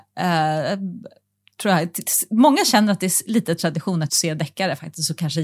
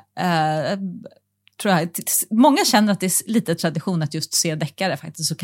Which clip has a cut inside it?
first; 1 cut; at 4.1 s

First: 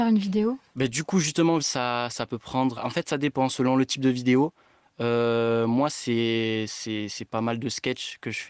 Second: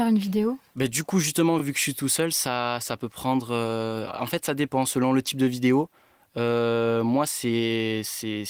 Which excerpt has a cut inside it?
first; 2 cuts; at 1.6 s, 2.8 s

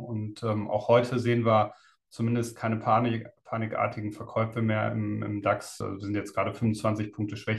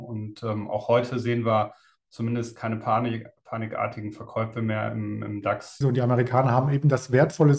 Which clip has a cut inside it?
second; 1 cut; at 5.8 s

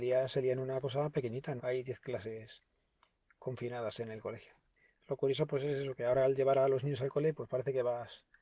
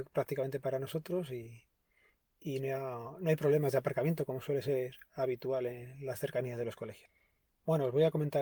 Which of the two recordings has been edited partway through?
first; 1 cut; at 1.6 s

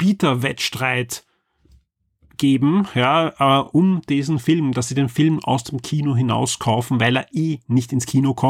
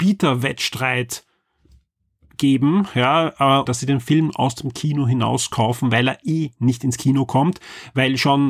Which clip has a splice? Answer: second; 1 cut; at 3.7 s

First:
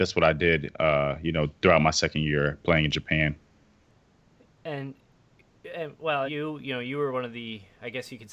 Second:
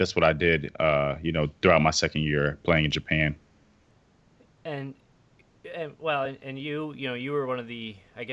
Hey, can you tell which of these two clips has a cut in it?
first; 1 cut; at 6.3 s

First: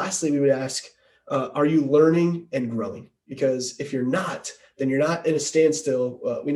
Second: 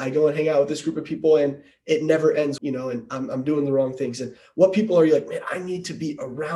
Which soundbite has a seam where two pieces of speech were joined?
second; 1 cut; at 2.6 s

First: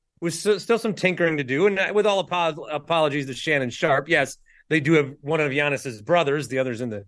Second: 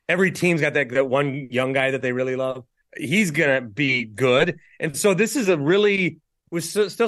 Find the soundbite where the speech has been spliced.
second; 1 cut; at 2.8 s

